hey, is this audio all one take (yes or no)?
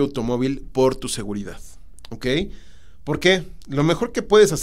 yes